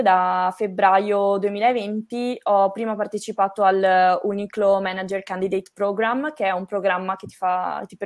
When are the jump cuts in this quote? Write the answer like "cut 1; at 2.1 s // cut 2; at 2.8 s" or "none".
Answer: none